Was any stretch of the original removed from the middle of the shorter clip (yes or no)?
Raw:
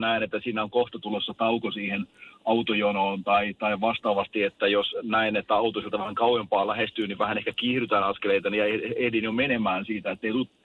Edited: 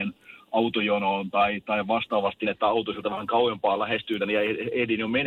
yes